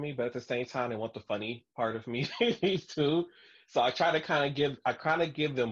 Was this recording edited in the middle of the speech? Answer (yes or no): no